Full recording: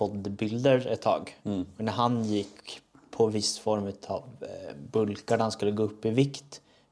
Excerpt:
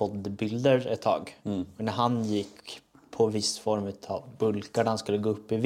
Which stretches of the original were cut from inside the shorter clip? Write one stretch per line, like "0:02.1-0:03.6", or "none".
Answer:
0:04.4-0:04.9